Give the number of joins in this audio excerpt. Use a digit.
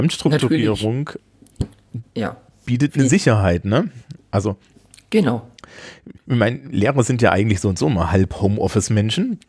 0